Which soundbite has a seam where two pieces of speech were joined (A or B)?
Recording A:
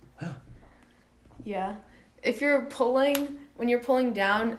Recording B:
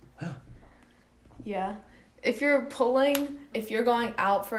B